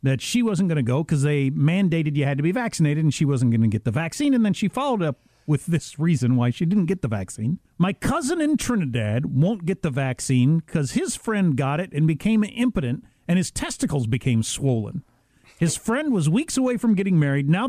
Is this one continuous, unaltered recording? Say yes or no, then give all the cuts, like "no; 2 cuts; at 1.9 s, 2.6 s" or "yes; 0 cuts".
no; 1 cut; at 7.7 s